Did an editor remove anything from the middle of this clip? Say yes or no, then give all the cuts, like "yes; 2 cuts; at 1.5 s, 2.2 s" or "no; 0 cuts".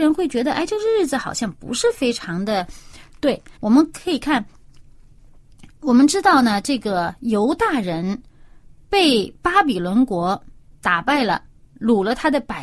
yes; 1 cut; at 3.5 s